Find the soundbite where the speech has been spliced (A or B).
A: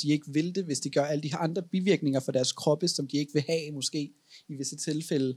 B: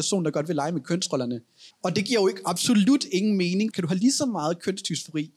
B